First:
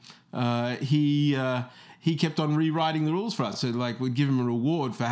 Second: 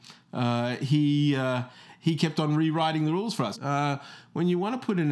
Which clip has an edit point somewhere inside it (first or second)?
second